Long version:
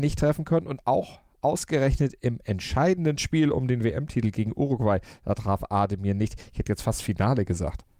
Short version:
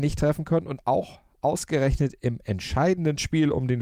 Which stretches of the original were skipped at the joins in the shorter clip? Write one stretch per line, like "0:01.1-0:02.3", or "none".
none